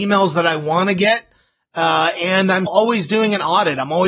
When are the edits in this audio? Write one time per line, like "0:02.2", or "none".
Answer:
0:02.7

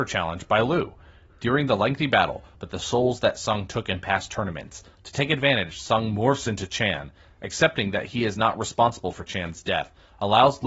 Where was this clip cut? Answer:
0:02.5

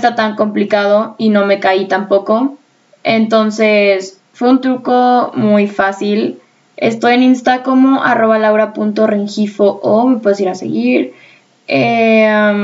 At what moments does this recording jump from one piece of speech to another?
0:06.7

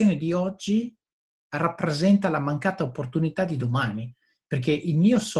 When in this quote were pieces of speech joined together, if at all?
none

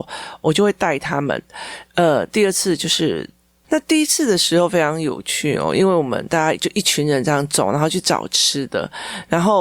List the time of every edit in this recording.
0:03.6

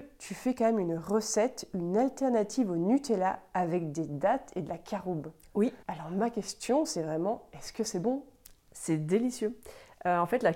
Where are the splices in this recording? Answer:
0:05.8

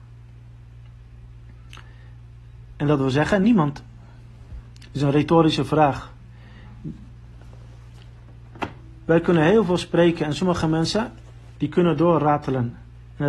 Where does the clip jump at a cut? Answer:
none

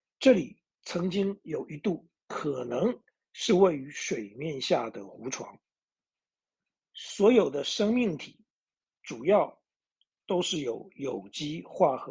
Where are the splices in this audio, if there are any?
0:06.9

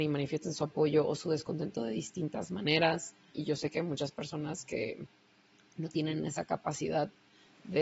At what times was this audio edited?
0:03.3

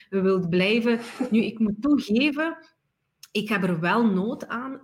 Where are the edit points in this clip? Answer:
none

